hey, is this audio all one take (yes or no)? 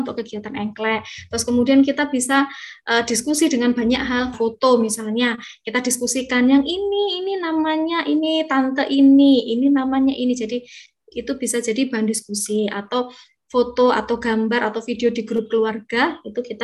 no